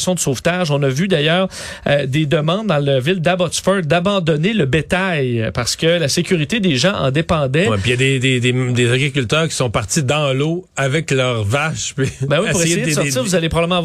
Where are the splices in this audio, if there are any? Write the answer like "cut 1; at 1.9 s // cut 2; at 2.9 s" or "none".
none